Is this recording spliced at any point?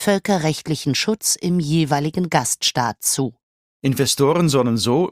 yes; 1 cut; at 3.8 s

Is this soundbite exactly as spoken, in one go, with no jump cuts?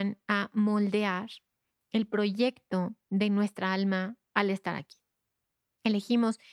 yes; 0 cuts

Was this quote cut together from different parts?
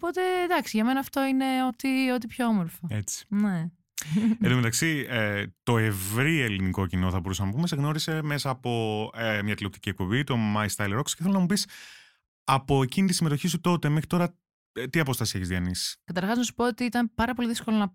no; 0 cuts

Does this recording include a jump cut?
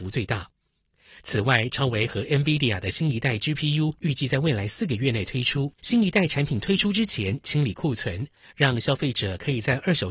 yes; 2 cuts; at 5.8 s, 8.4 s

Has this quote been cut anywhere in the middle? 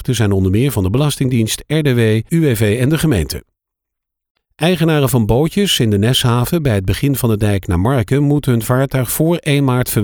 yes; 1 cut; at 2.3 s

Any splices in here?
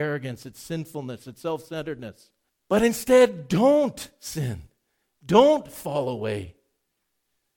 yes; 1 cut; at 2.5 s

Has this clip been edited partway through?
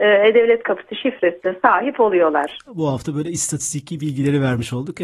yes; 1 cut; at 2.7 s

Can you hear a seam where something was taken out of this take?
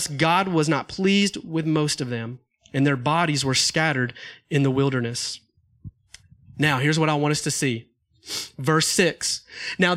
no; 0 cuts

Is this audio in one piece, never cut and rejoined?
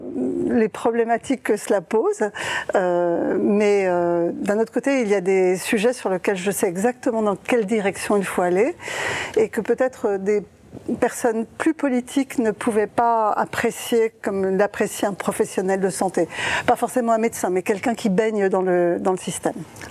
no; 1 cut; at 12.9 s

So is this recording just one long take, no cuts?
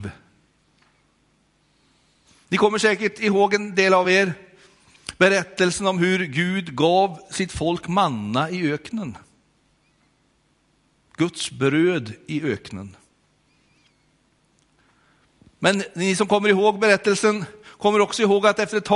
yes; 0 cuts

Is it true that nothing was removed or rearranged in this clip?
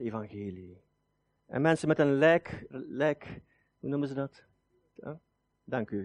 no; 2 cuts; at 2.7 s, 5.0 s

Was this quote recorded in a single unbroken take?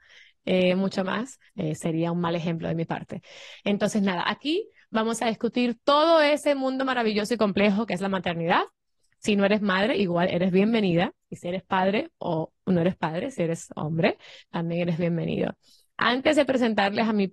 no; 1 cut; at 1.5 s

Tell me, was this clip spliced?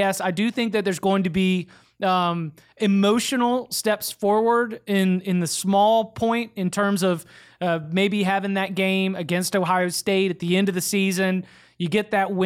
no; 0 cuts

